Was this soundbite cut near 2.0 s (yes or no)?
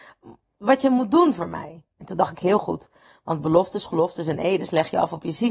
yes